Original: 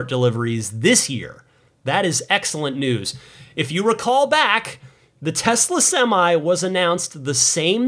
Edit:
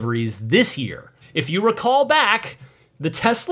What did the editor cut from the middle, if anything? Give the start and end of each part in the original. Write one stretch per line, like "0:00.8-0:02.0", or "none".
0:01.5-0:03.4